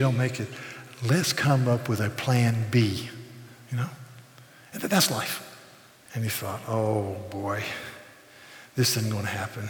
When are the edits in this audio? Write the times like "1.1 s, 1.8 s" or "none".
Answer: 6.1 s

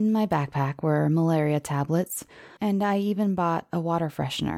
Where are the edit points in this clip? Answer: 2.6 s

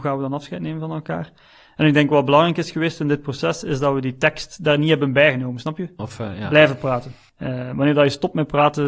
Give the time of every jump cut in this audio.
6.0 s, 7.3 s

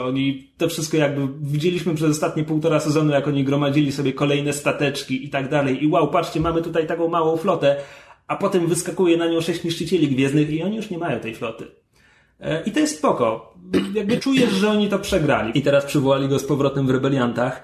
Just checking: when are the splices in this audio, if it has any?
14.2 s, 15.5 s

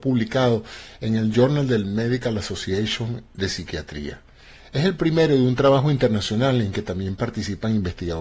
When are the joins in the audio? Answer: none

